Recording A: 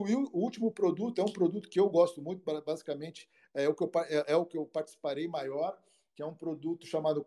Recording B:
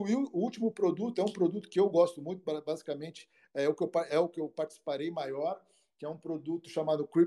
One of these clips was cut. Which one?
B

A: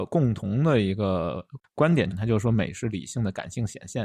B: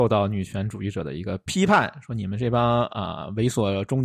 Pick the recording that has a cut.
A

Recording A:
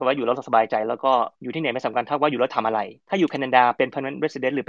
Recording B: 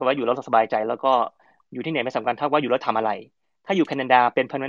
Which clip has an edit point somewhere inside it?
A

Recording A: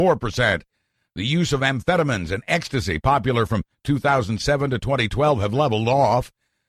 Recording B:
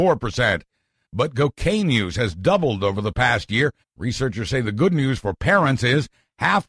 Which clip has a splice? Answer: B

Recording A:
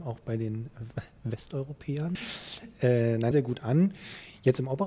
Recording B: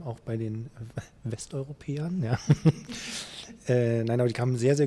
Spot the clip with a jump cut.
A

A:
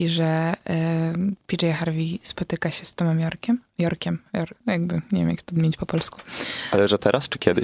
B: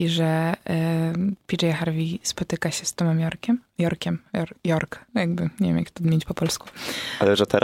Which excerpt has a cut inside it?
A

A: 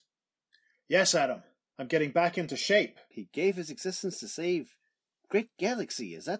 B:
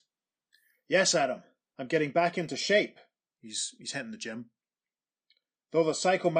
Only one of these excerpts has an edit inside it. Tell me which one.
A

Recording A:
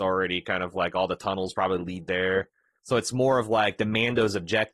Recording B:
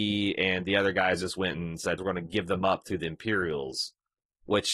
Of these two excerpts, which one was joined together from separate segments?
B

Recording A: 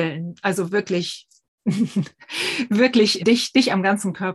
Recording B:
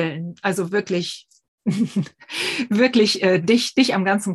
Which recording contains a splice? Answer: A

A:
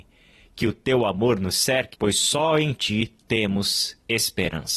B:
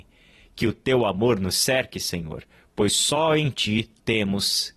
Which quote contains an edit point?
A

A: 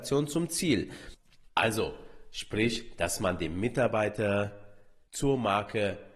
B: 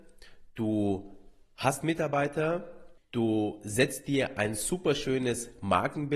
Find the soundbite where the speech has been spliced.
A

